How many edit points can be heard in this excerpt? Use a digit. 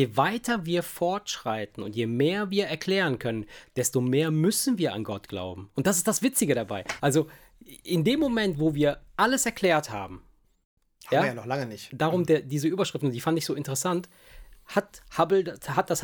2